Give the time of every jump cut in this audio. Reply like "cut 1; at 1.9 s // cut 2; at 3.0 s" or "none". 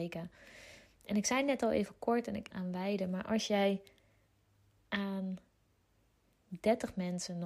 cut 1; at 2.5 s

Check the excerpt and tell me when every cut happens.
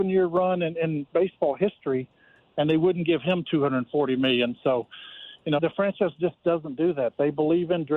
cut 1; at 5.6 s

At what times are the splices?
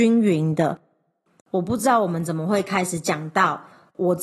cut 1; at 1.4 s

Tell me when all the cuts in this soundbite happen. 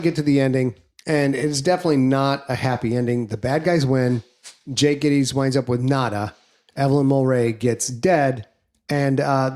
none

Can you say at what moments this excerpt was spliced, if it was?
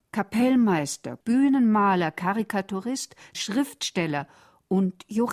cut 1; at 1.2 s // cut 2; at 3.3 s

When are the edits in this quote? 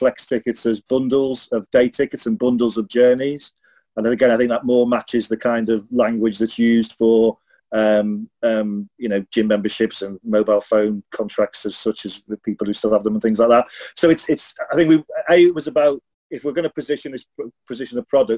none

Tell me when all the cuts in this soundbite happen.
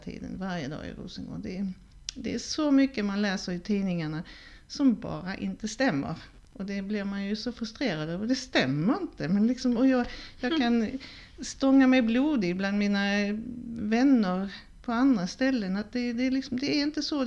none

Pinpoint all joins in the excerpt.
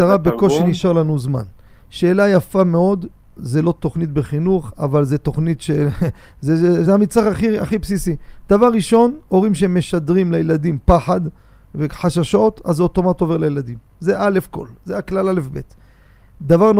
cut 1; at 6.9 s

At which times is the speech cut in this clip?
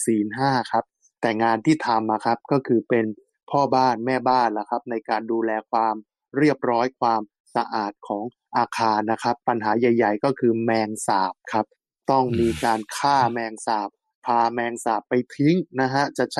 none

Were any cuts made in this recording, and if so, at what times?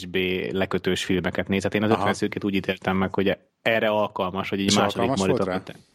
none

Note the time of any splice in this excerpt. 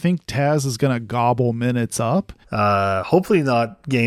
cut 1; at 2.4 s

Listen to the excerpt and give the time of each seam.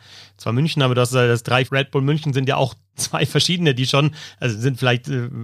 cut 1; at 1.7 s

